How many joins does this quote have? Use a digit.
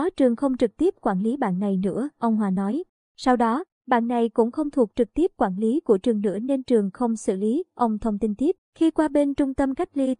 2